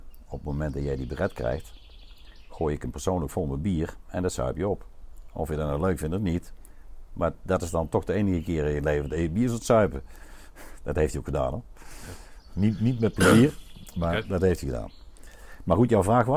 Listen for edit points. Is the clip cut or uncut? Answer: uncut